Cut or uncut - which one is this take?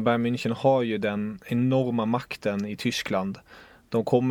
uncut